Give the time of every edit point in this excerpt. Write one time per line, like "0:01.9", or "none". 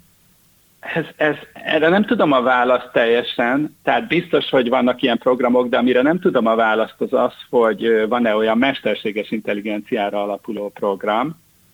none

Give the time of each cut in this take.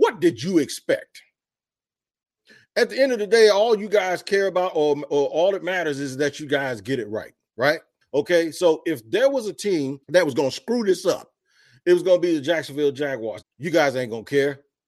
0:08.0
0:10.0
0:13.4

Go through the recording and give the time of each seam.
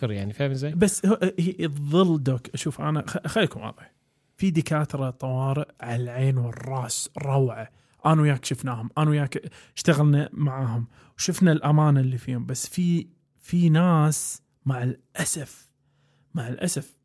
none

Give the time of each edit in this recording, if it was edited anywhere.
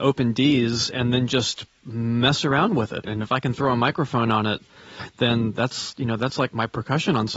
0:03.0

